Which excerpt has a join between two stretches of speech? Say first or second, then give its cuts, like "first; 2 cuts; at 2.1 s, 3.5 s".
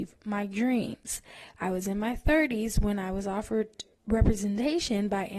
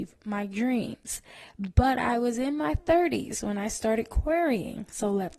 first; 2 cuts; at 1.6 s, 3.9 s